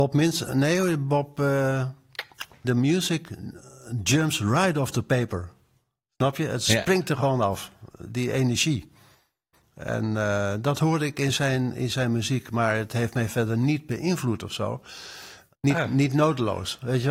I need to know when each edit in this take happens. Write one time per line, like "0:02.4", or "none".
0:02.6
0:15.5